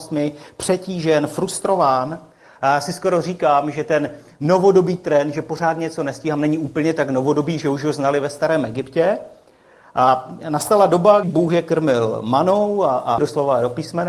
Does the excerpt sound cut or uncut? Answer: cut